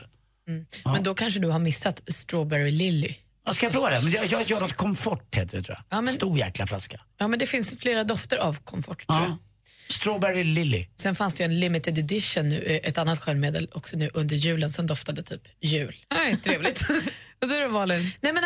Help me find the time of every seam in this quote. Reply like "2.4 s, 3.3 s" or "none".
16.0 s